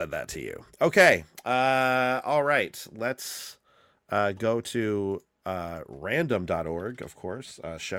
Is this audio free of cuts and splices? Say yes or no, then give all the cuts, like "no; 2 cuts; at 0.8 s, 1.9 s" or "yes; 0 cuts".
yes; 0 cuts